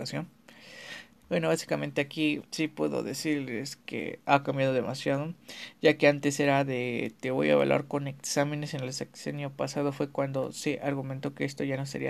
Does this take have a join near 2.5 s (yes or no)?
yes